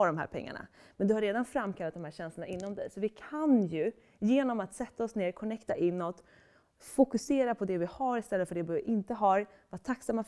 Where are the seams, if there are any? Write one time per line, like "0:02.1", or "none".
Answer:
none

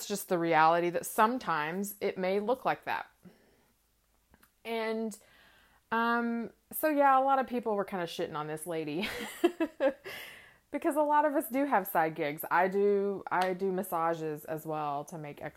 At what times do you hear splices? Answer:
none

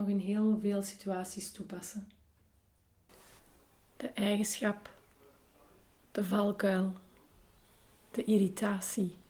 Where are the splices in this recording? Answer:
none

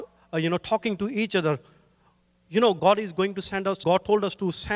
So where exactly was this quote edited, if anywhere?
0:02.8
0:03.8

